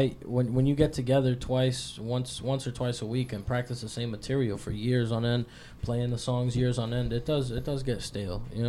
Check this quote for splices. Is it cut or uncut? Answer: uncut